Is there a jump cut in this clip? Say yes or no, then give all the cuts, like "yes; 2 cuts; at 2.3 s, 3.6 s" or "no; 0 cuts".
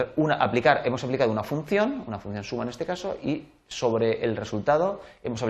no; 0 cuts